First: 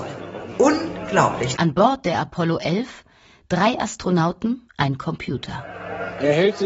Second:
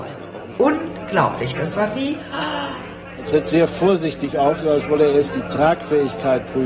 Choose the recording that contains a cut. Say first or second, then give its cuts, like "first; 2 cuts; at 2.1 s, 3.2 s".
first; 2 cuts; at 1.5 s, 4.7 s